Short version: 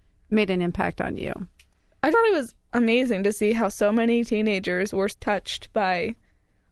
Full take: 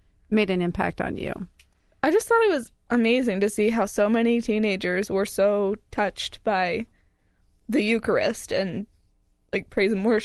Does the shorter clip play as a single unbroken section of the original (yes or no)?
no